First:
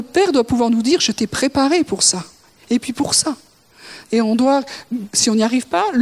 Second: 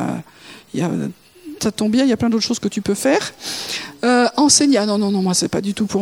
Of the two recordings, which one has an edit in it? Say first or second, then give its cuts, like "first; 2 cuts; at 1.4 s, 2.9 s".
first; 1 cut; at 2.6 s